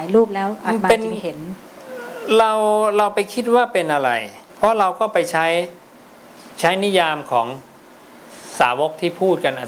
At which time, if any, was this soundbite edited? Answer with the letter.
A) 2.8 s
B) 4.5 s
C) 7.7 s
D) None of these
B